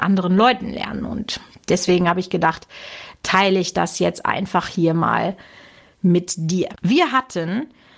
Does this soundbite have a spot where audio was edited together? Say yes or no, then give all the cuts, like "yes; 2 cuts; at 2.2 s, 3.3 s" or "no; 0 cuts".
yes; 1 cut; at 6.8 s